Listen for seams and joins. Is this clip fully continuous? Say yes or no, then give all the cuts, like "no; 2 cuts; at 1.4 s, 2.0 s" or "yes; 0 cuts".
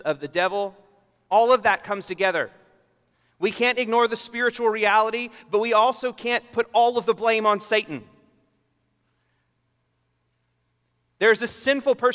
yes; 0 cuts